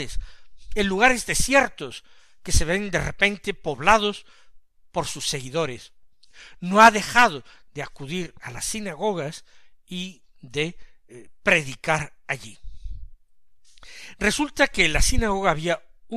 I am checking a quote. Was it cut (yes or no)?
no